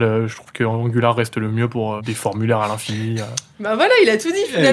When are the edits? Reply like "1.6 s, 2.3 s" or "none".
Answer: 2.0 s

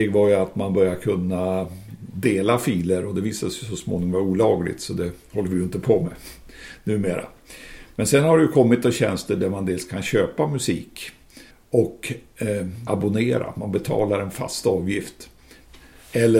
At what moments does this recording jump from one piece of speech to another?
11.5 s, 12.9 s

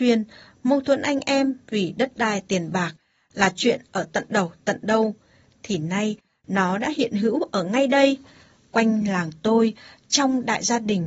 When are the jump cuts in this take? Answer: none

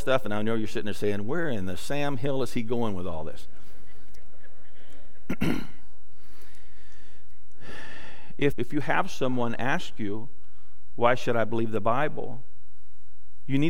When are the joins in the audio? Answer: 8.5 s

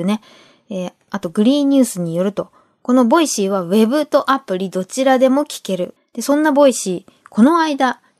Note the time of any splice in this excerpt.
6.0 s

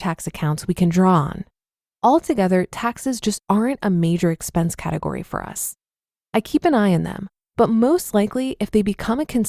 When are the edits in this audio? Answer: 1.8 s

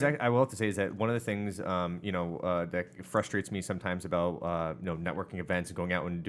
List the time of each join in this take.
none

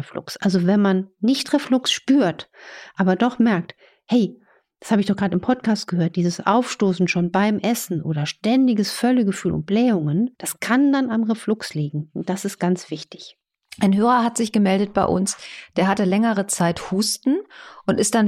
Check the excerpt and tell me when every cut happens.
10.3 s

